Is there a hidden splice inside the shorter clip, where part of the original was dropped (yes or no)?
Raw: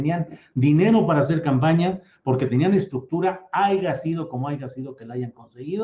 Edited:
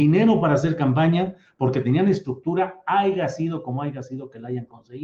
no